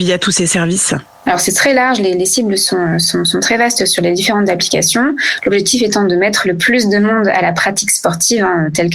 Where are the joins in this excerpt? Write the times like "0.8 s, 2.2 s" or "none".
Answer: none